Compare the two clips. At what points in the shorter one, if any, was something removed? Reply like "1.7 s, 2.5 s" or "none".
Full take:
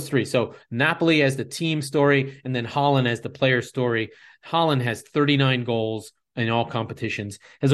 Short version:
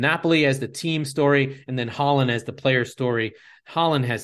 none